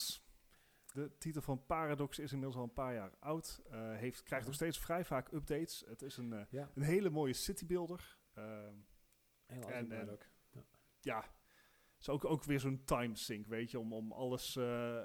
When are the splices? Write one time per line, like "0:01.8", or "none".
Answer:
0:00.9